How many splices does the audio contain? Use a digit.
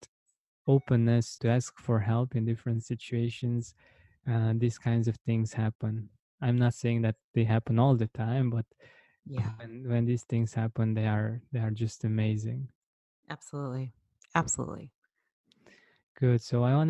1